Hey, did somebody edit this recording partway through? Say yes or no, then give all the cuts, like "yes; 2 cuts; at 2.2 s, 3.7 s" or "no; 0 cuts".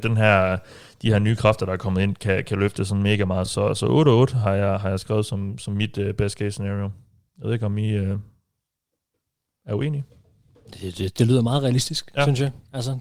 no; 0 cuts